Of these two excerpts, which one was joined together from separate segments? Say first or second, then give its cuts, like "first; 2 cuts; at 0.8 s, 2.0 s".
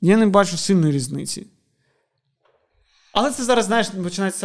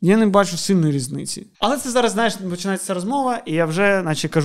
second; 1 cut; at 1.5 s